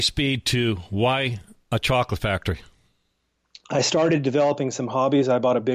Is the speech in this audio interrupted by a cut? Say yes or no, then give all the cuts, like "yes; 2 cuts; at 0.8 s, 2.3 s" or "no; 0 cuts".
no; 0 cuts